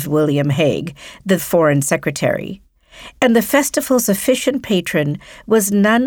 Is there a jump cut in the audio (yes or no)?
yes